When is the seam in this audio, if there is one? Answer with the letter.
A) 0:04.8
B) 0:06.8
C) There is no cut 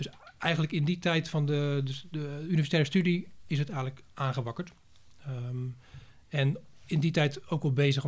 C